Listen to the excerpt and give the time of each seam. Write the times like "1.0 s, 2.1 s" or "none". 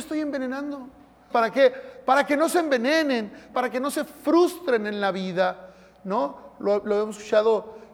1.3 s, 3.5 s

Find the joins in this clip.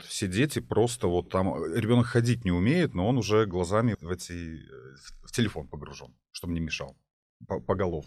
3.9 s

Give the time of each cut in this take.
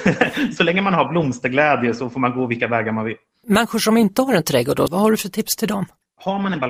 4.9 s

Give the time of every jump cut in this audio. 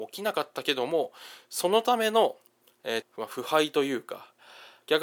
3.0 s

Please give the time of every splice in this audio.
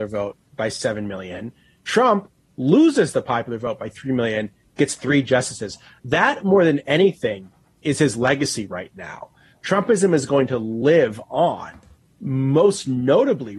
none

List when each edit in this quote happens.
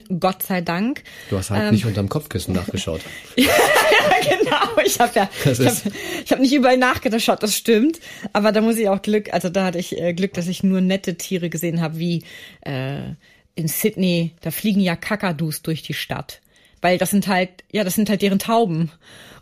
none

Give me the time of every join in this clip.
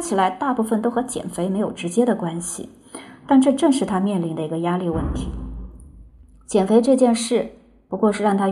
none

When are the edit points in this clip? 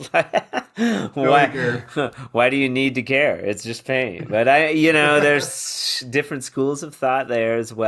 none

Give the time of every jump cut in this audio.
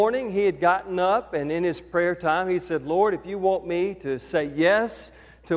none

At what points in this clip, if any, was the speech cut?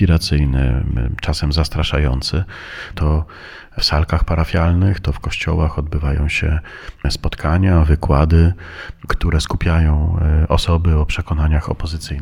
2.9 s

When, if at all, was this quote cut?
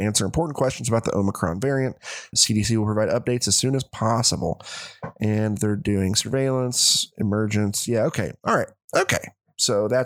2.3 s

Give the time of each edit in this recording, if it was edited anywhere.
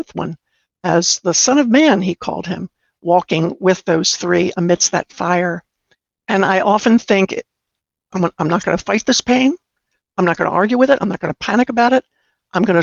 none

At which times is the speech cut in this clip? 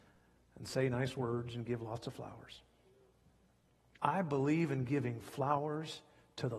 3.9 s

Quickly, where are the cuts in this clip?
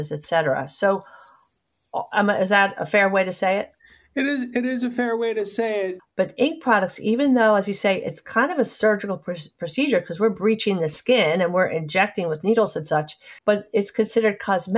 6.0 s, 13.4 s

